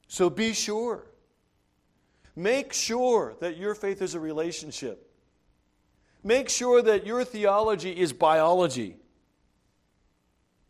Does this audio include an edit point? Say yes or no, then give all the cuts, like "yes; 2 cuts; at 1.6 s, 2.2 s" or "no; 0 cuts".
yes; 1 cut; at 2.2 s